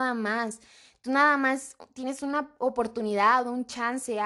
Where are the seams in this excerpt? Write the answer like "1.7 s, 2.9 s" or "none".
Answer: none